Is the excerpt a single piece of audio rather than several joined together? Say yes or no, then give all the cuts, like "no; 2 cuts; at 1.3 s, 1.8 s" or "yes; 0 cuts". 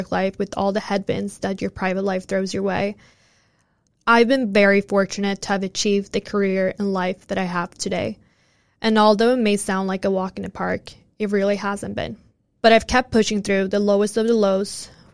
no; 2 cuts; at 3.9 s, 12.6 s